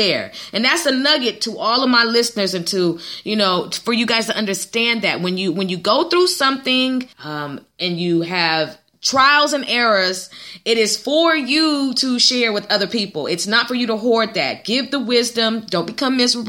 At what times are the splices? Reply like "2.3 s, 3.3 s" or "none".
7.1 s